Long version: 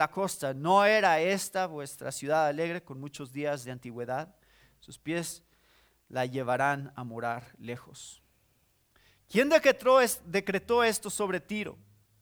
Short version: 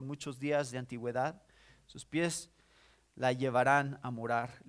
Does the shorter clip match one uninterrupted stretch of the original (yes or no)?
yes